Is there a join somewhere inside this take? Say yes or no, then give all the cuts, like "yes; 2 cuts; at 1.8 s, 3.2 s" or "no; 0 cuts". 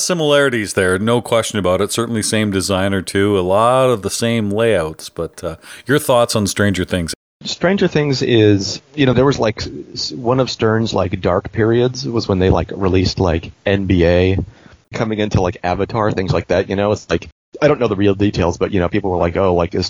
yes; 1 cut; at 9.1 s